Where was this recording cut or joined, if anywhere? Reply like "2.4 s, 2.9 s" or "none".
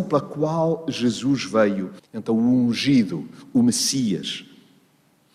2.0 s